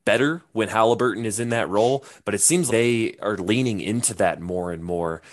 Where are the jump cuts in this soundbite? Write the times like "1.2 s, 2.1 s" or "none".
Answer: 2.7 s